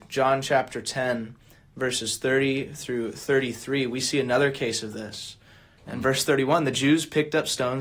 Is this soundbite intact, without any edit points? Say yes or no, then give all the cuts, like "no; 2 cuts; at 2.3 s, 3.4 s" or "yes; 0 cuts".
no; 1 cut; at 5.8 s